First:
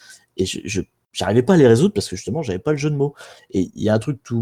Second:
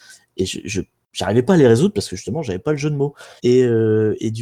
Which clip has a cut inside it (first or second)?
second